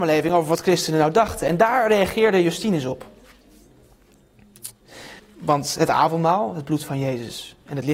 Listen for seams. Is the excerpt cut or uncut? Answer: cut